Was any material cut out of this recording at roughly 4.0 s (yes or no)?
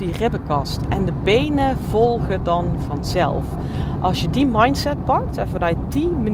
no